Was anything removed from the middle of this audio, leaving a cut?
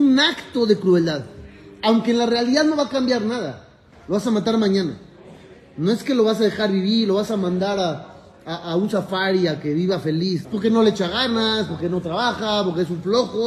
yes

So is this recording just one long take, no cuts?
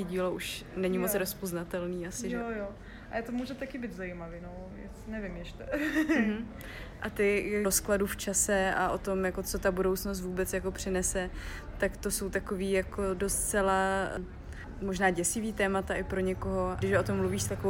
no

